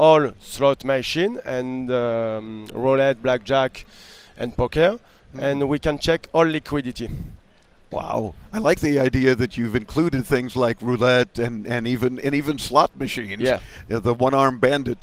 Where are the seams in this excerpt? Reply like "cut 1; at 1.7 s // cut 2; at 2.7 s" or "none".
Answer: none